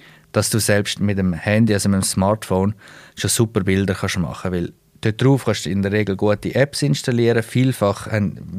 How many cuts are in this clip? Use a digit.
0